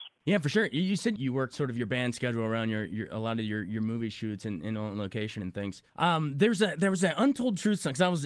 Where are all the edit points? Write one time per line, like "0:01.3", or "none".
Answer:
none